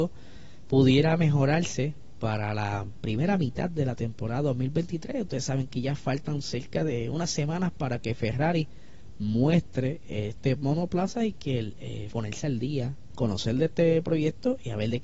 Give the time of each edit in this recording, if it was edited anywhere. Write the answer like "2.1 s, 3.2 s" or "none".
12.1 s